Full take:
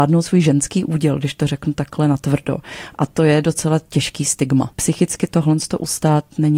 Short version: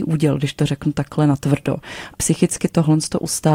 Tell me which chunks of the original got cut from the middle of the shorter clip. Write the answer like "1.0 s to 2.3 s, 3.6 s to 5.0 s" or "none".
2.9 s to 4.7 s